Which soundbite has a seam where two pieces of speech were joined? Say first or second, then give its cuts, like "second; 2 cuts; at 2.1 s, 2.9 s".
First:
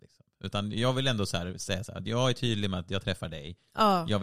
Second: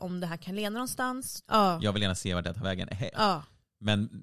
second; 2 cuts; at 1.4 s, 3.1 s